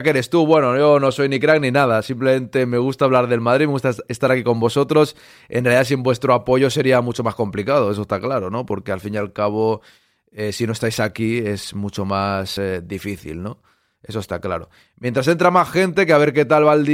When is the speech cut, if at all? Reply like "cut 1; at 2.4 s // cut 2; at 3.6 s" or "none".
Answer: none